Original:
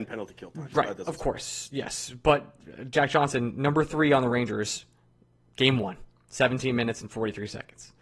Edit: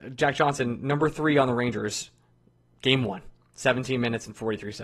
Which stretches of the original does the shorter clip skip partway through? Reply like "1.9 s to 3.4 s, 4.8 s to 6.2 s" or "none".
none